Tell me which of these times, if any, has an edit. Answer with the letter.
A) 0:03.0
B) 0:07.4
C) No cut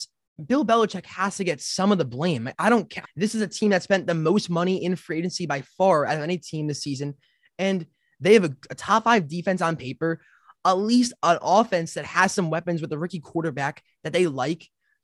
A